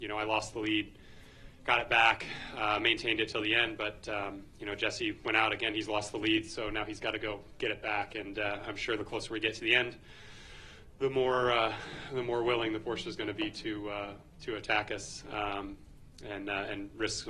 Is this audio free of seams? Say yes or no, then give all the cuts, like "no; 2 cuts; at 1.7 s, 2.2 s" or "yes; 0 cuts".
yes; 0 cuts